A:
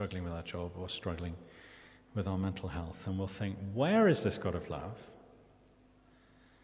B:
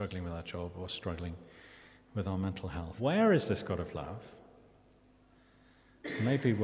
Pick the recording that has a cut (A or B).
B